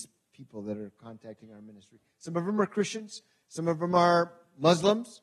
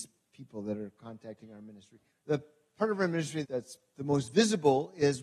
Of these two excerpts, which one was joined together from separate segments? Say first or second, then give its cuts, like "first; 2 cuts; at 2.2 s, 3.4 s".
second; 2 cuts; at 2.1 s, 3.4 s